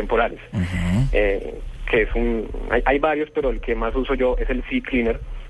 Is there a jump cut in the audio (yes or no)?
no